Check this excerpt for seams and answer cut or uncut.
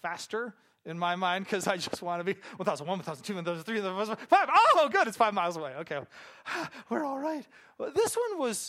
uncut